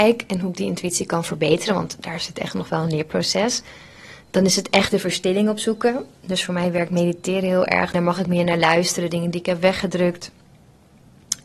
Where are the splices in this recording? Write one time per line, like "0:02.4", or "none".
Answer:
0:07.9